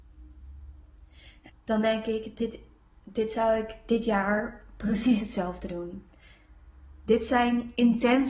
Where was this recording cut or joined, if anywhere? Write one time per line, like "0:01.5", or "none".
0:01.5